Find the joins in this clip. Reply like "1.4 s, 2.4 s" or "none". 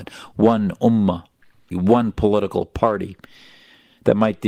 1.7 s

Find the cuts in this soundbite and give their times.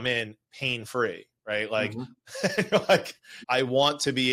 2.2 s, 3.4 s

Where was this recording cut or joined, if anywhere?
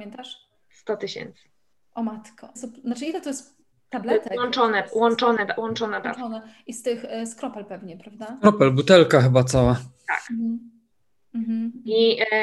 2.5 s

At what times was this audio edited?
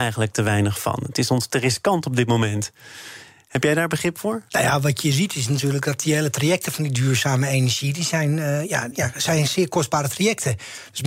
4.5 s, 8.9 s

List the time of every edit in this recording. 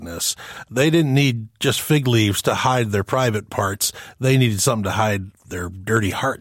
none

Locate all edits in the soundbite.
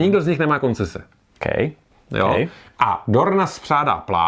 1.9 s

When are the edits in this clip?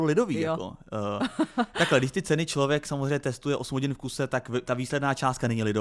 none

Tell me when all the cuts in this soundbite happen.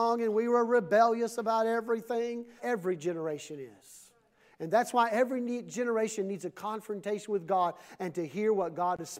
2.6 s

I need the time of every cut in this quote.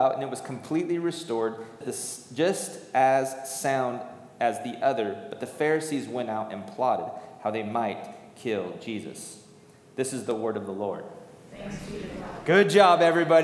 1.8 s

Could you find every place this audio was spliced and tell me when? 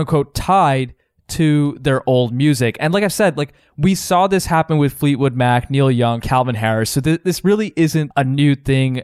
6.2 s, 8.1 s

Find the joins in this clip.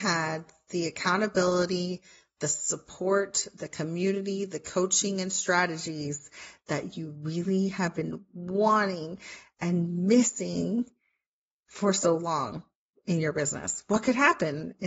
none

